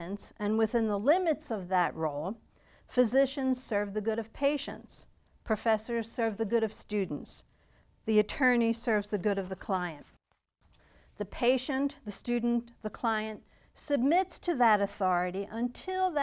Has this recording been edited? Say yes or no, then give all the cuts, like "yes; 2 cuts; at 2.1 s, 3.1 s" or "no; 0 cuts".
no; 0 cuts